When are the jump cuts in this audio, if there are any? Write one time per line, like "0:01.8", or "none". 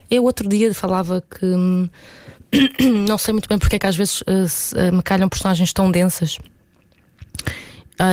none